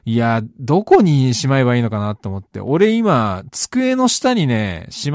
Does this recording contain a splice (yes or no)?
no